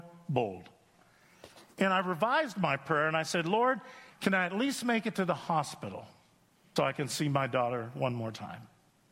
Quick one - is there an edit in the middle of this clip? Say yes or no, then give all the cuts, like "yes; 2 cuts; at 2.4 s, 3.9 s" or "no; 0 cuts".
yes; 2 cuts; at 4.1 s, 6.8 s